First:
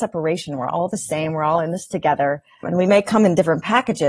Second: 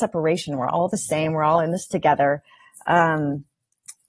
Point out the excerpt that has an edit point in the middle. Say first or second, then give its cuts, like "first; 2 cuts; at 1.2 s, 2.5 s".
first; 1 cut; at 2.6 s